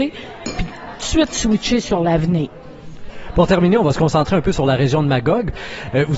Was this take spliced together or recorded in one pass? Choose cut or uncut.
uncut